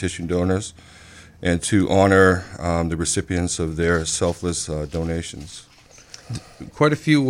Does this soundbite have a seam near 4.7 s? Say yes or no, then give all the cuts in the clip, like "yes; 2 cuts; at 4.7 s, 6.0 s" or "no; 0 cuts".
no; 0 cuts